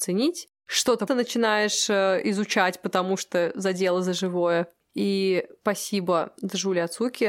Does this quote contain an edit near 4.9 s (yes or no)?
no